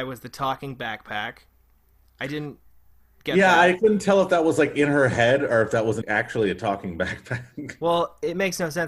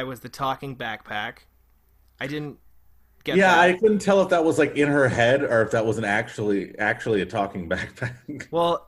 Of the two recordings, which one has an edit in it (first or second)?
first